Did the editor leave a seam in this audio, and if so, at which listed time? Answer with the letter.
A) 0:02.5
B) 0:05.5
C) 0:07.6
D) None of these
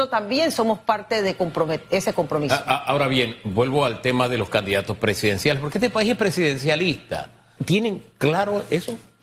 C